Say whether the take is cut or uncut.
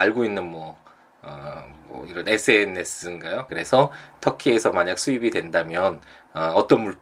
cut